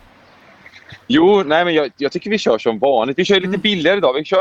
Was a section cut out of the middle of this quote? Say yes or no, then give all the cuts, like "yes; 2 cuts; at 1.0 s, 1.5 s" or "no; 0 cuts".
no; 0 cuts